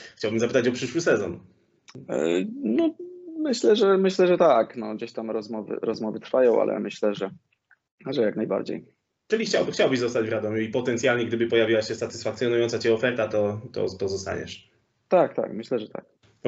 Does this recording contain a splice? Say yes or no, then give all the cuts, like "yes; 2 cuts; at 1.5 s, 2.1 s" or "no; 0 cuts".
no; 0 cuts